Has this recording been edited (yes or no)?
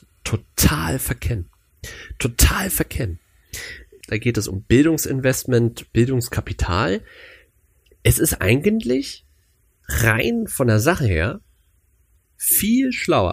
yes